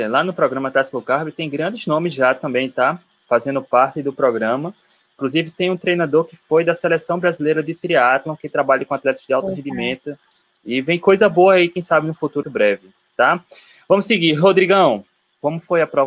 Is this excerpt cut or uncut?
cut